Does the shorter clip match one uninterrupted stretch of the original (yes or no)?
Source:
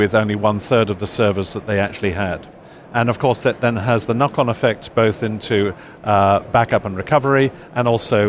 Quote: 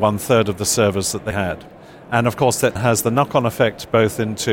no